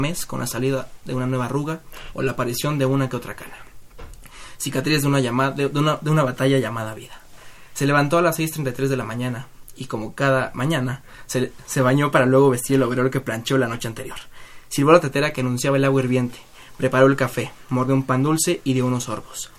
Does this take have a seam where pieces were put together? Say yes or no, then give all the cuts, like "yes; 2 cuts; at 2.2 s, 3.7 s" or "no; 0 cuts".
no; 0 cuts